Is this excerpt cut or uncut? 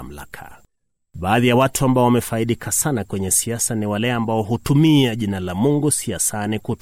cut